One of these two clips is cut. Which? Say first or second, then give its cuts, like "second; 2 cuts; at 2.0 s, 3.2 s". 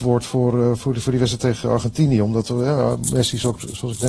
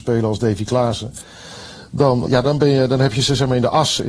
second; 1 cut; at 2.3 s